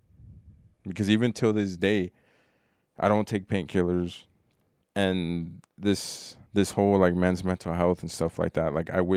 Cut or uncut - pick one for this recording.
cut